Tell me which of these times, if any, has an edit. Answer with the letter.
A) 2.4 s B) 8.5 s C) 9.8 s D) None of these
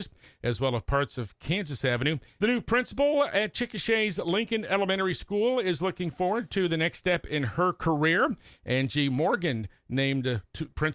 A